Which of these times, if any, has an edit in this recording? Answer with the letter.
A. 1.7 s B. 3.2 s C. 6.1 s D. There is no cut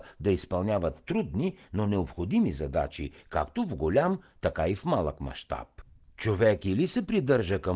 D